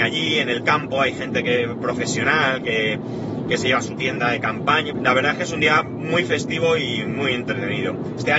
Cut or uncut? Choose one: cut